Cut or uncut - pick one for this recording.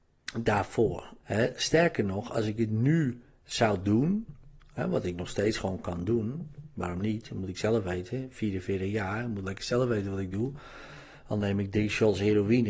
cut